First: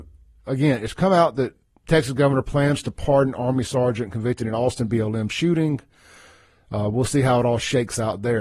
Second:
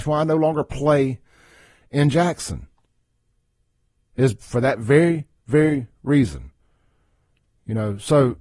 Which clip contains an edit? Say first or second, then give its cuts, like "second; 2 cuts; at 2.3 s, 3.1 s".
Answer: first; 1 cut; at 1.8 s